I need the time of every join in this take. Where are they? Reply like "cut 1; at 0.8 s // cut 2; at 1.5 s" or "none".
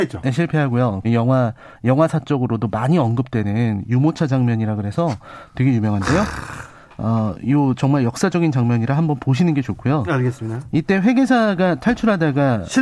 cut 1; at 1.0 s